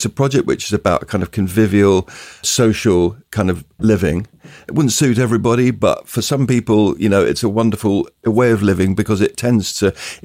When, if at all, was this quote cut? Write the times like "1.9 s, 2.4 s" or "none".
none